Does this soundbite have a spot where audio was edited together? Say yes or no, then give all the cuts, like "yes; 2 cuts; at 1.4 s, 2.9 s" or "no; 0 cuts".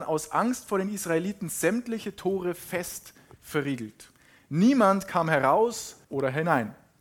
yes; 1 cut; at 6.0 s